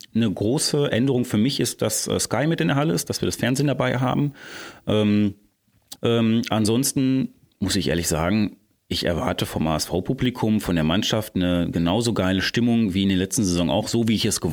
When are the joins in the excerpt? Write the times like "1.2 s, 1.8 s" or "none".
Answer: 6.0 s